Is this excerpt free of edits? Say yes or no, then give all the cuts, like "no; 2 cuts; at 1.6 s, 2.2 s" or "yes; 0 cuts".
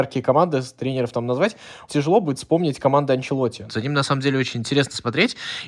no; 2 cuts; at 1.9 s, 3.7 s